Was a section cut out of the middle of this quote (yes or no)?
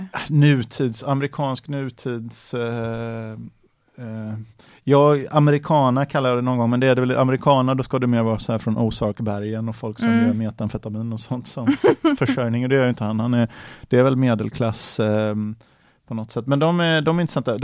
no